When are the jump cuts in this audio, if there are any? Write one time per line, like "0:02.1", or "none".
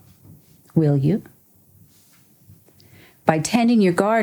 none